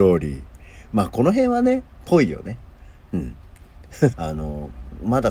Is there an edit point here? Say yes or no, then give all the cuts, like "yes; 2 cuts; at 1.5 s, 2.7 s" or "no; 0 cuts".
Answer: yes; 1 cut; at 4.1 s